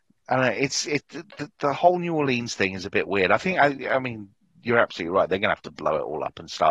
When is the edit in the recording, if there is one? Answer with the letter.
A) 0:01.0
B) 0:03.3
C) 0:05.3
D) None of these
D